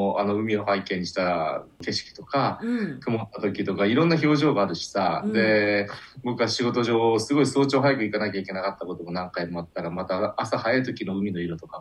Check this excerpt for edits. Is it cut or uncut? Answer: uncut